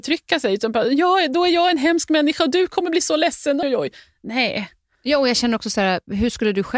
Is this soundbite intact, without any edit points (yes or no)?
no